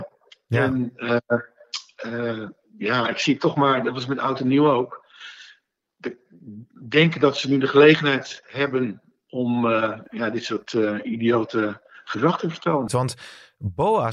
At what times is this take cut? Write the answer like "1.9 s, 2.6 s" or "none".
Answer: 12.9 s